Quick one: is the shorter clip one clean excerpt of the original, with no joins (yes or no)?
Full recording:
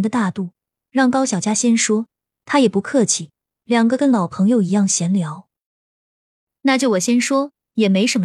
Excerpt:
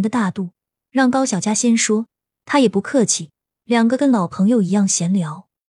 yes